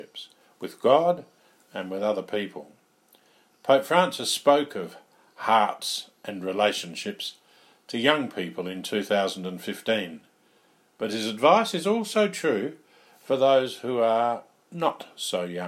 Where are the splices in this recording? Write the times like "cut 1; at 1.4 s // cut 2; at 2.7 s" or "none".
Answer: none